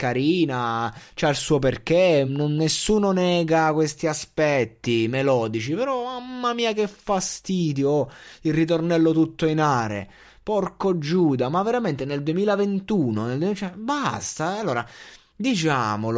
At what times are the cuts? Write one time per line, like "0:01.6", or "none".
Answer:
none